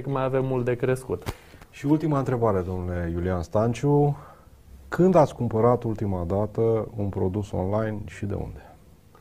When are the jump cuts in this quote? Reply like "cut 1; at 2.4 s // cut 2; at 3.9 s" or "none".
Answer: none